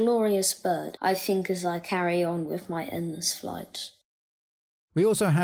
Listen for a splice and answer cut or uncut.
cut